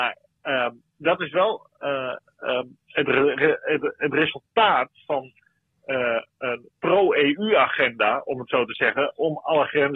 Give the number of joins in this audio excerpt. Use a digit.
1